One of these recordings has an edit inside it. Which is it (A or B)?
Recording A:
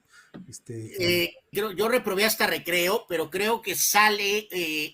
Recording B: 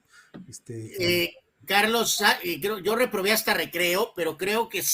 A